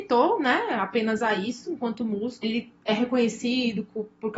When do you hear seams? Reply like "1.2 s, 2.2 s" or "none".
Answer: 2.4 s